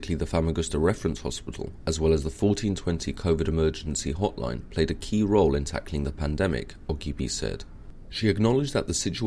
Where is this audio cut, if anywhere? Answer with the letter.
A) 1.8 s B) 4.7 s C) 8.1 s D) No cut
C